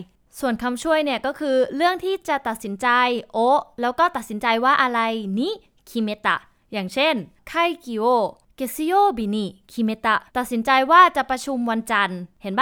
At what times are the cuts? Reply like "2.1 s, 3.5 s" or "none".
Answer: 10.3 s